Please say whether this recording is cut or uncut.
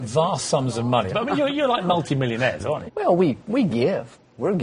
cut